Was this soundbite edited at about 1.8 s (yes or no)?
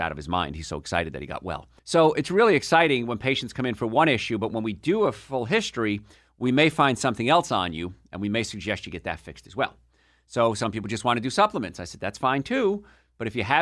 yes